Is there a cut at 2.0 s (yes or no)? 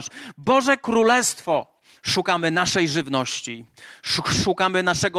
yes